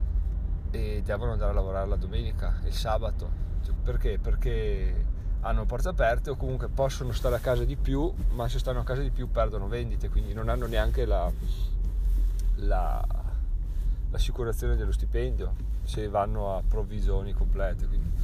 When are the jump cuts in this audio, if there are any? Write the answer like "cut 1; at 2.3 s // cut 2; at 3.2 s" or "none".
cut 1; at 3.8 s